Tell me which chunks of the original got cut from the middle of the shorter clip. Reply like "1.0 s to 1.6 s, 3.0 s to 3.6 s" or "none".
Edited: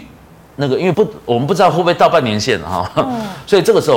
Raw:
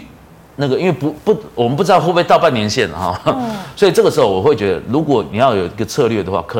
0.9 s to 1.2 s